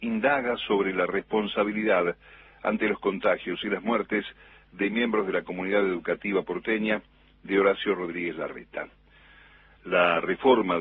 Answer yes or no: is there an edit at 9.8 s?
yes